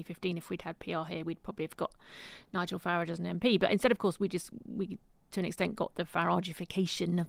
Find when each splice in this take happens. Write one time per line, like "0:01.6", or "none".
none